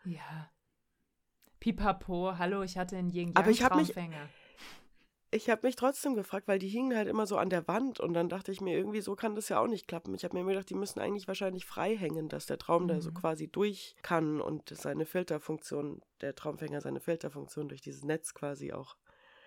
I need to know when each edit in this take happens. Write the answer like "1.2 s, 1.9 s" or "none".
14.0 s